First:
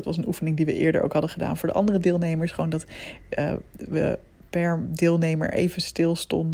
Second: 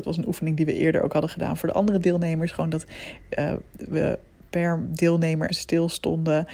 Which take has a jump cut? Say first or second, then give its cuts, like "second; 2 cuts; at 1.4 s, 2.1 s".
second; 1 cut; at 5.5 s